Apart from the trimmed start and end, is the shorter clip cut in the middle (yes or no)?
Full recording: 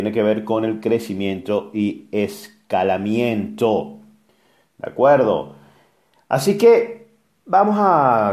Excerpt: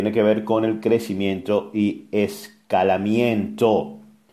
no